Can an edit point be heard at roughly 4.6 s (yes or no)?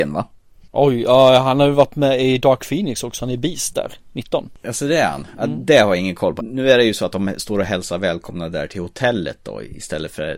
no